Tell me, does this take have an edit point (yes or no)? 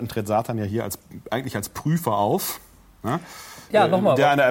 no